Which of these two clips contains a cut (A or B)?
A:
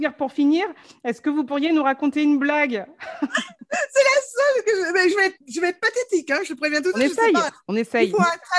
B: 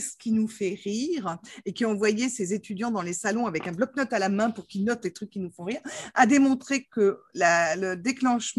A